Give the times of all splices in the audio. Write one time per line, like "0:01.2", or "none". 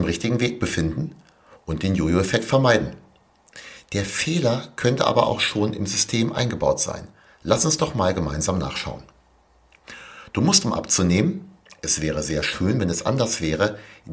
none